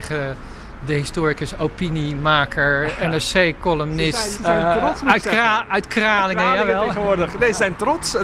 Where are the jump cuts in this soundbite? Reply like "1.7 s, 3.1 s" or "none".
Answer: 4.4 s